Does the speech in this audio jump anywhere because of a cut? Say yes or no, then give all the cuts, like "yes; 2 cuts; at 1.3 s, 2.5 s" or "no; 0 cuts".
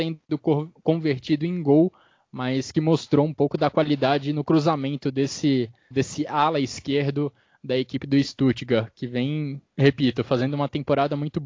yes; 2 cuts; at 5.9 s, 9.7 s